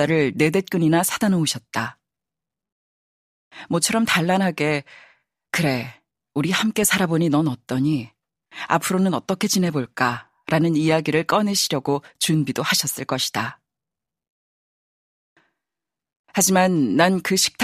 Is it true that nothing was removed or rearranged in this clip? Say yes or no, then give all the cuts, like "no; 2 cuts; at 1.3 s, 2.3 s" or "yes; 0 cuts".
yes; 0 cuts